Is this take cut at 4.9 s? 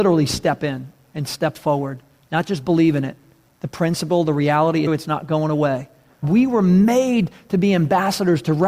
yes; 2 cuts; at 4.9 s, 6.2 s

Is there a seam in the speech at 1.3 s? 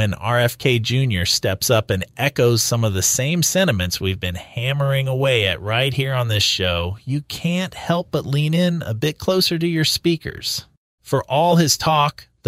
no; 1 cut; at 11.0 s

